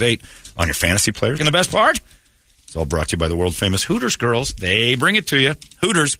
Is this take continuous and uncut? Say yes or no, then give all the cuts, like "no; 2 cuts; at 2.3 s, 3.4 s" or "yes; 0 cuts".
no; 1 cut; at 1.4 s